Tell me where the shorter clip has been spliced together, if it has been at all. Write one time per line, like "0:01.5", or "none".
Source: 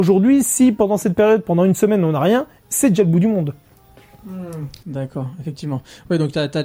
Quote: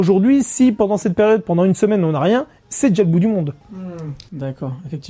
0:03.6